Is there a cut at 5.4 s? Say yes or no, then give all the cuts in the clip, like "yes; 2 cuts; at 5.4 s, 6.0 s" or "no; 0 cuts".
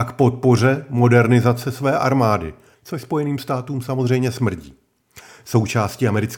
no; 1 cut; at 2.7 s